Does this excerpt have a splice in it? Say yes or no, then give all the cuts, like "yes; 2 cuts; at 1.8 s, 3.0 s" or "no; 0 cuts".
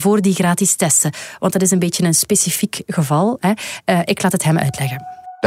no; 0 cuts